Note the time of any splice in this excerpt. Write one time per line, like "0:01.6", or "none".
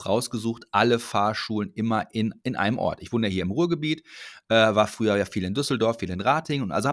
none